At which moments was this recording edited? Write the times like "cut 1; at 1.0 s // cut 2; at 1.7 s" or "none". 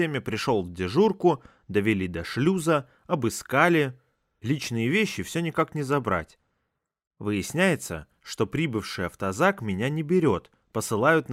none